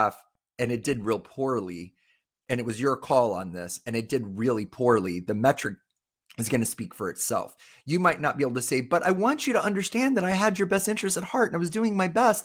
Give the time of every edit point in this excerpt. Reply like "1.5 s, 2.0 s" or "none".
none